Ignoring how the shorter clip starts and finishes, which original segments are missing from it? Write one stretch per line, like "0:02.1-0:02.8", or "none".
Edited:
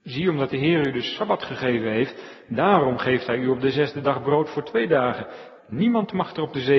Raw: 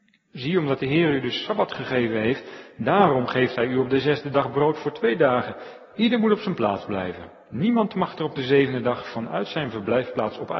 0:05.9-0:07.4